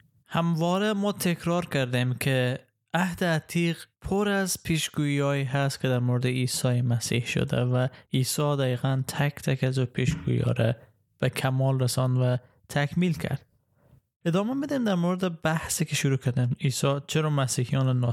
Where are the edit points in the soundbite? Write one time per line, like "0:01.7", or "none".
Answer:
0:03.9